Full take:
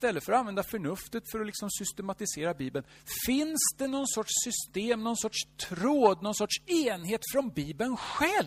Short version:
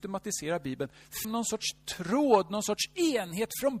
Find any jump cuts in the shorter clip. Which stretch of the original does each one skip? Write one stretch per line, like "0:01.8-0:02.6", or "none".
0:03.2-0:05.0